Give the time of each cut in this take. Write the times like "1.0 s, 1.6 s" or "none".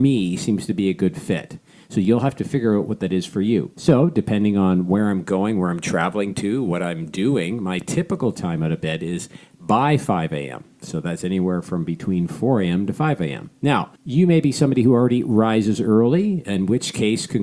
3.7 s, 14.0 s